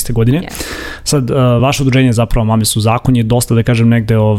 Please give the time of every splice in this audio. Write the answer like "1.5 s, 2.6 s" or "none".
none